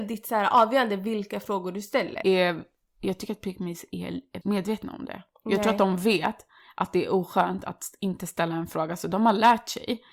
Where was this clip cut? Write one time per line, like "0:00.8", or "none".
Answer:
0:02.2
0:04.4